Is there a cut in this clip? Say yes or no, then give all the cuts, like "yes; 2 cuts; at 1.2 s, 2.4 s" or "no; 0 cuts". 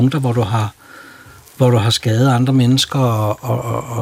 no; 0 cuts